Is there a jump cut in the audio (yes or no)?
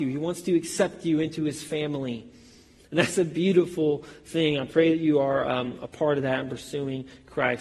no